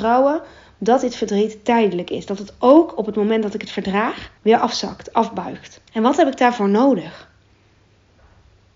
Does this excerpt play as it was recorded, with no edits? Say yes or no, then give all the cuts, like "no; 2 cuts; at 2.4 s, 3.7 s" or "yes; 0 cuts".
no; 2 cuts; at 4.4 s, 5.9 s